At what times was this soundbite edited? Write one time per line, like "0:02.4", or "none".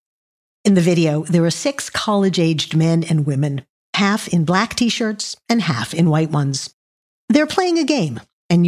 none